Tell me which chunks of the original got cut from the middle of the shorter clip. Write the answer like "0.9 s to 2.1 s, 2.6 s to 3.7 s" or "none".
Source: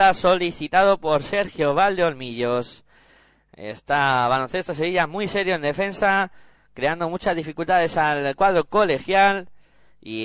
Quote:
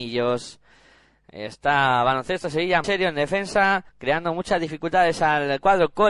5.1 s to 5.3 s, 6.4 s to 6.6 s